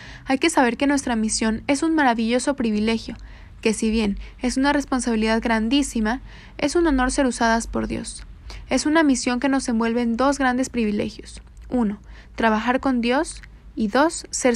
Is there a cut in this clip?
no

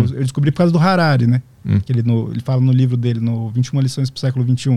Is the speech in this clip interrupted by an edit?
no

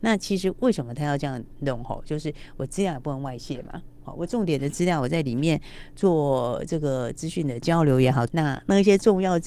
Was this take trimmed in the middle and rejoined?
yes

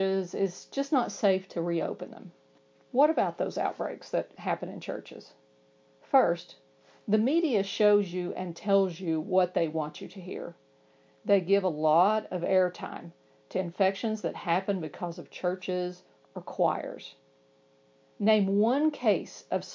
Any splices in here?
no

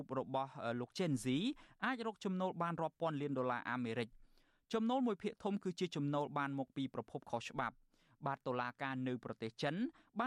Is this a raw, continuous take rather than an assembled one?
yes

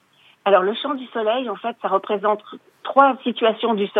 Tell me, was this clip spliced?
no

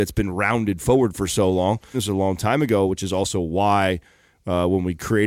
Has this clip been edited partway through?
yes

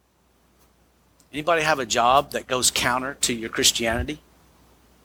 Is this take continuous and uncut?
yes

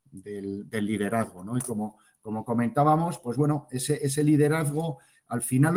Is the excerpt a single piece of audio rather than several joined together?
yes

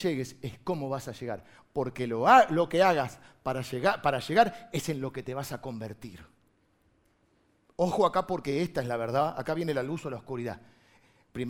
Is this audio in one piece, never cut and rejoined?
yes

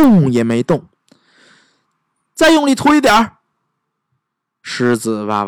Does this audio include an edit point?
no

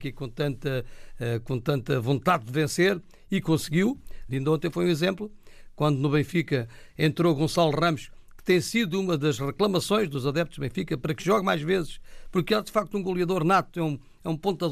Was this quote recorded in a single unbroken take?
no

